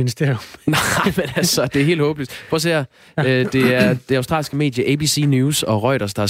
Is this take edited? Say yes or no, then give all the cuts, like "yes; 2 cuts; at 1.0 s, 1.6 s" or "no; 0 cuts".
no; 0 cuts